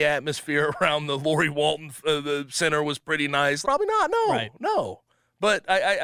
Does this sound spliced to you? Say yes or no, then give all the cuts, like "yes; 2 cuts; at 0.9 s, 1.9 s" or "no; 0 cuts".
yes; 1 cut; at 3.6 s